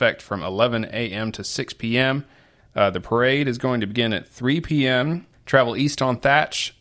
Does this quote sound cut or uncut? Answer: cut